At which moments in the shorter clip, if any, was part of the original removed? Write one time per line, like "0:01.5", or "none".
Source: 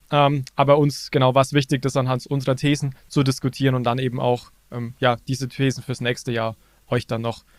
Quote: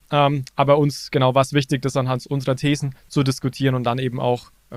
none